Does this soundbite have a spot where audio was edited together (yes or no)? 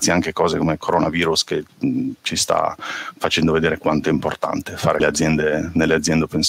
yes